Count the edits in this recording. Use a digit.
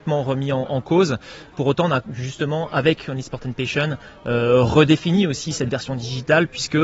0